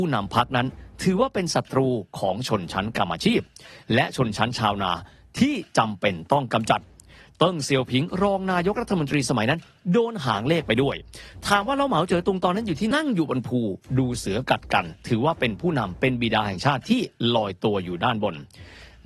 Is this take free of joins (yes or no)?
no